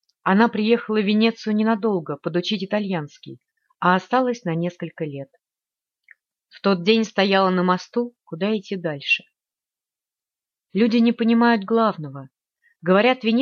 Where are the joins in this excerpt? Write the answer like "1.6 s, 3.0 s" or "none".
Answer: 8.2 s